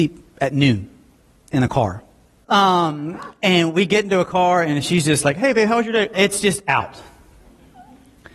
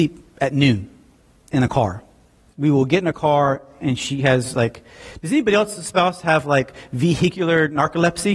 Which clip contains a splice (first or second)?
first